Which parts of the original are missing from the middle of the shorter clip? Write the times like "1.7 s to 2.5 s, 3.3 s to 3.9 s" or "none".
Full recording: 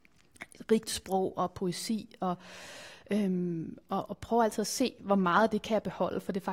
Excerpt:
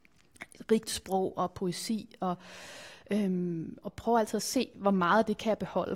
3.8 s to 4.1 s